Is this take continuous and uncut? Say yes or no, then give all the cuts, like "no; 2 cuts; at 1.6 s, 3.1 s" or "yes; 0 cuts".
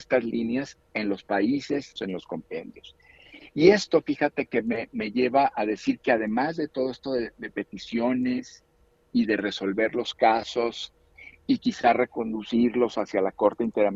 no; 1 cut; at 2.0 s